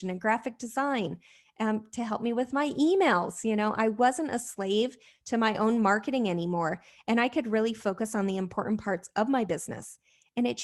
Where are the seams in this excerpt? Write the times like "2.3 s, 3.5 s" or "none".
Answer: none